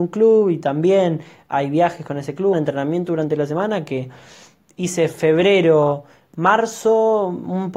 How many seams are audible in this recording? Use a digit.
1